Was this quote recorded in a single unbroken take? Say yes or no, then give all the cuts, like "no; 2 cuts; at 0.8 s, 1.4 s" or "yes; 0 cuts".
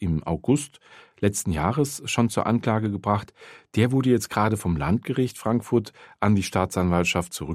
yes; 0 cuts